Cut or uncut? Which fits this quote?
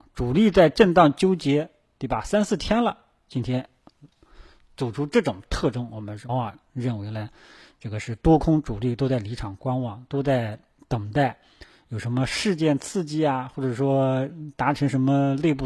cut